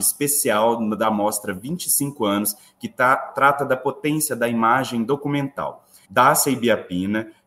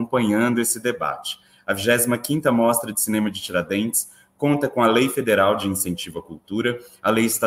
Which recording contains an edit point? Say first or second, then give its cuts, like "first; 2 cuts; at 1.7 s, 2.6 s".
first; 1 cut; at 6.0 s